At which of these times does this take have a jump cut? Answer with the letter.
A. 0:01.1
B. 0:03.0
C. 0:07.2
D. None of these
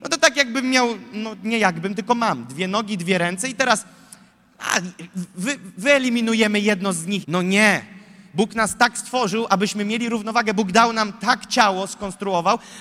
C